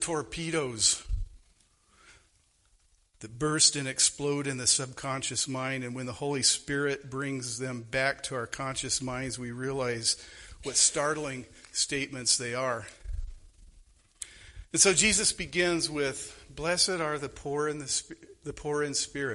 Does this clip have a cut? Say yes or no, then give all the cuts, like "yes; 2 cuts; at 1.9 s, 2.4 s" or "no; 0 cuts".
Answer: no; 0 cuts